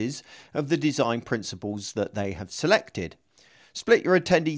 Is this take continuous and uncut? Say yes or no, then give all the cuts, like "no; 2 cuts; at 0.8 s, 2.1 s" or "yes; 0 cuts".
yes; 0 cuts